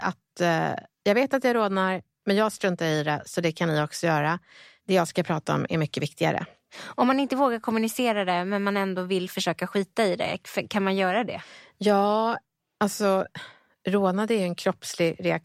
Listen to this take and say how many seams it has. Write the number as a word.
zero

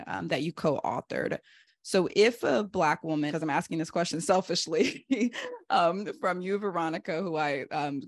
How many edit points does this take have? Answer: two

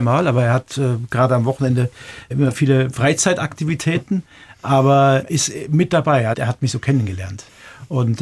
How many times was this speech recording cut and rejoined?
one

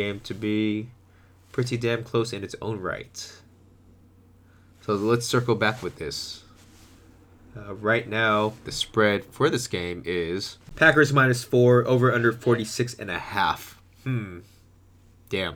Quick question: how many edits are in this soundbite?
zero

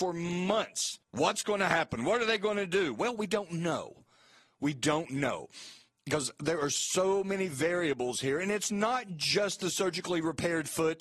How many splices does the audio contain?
one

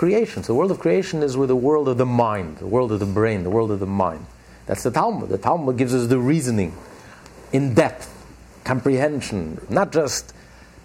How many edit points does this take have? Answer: two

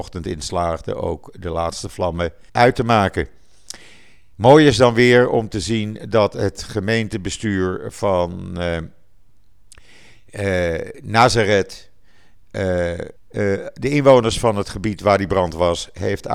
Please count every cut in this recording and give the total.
two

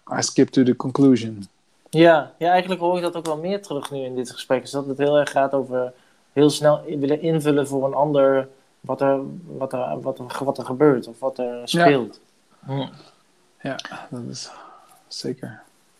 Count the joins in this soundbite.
one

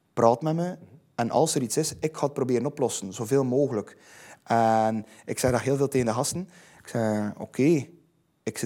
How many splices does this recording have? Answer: zero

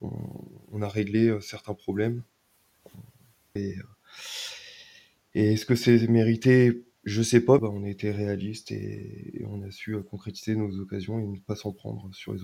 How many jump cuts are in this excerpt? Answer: two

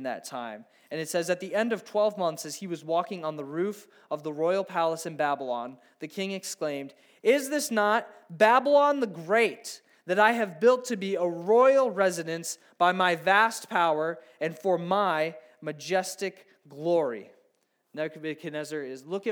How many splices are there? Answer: zero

